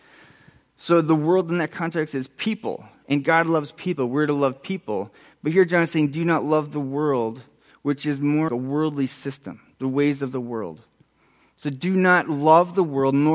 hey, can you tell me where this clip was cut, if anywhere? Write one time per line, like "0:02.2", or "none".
0:08.5

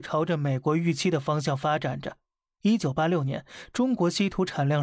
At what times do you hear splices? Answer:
none

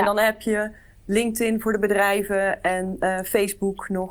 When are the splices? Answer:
none

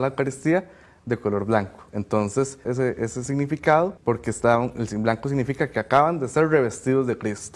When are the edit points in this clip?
0:02.7
0:04.0

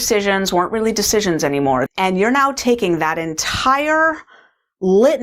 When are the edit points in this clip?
0:01.9

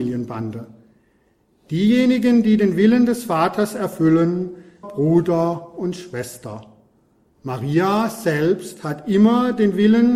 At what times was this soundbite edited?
0:04.8

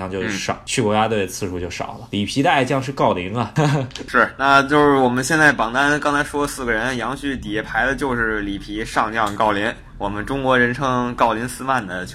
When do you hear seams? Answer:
none

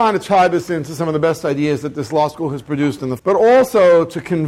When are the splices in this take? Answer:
0:03.2

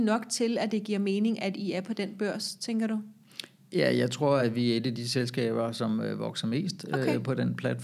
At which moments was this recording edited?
none

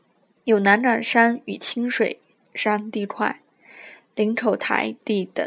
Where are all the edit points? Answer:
none

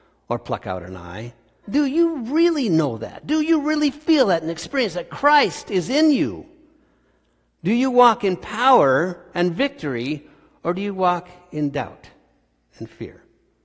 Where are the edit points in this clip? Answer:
0:01.6

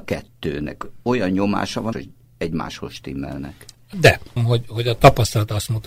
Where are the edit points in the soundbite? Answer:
0:01.9
0:04.4

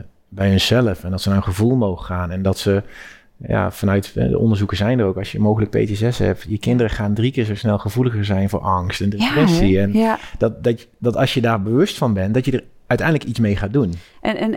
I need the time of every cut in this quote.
none

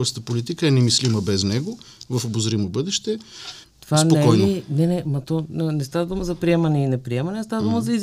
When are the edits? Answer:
0:03.6

